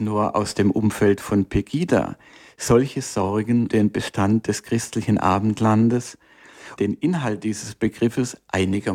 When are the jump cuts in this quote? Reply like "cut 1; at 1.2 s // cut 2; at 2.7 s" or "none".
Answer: cut 1; at 3.7 s // cut 2; at 6.8 s

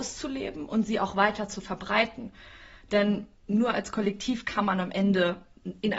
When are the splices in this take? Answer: none

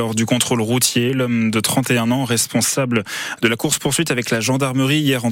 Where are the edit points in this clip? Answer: none

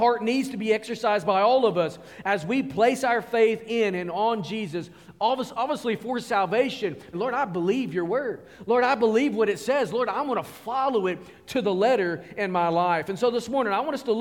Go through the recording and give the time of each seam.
cut 1; at 7.1 s

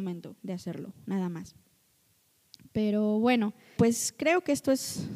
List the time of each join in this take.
cut 1; at 3.8 s

